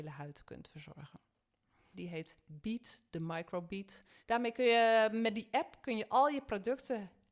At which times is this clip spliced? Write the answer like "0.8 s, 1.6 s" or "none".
1.9 s, 4.2 s